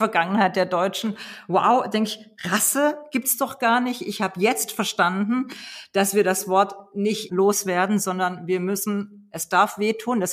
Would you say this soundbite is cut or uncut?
cut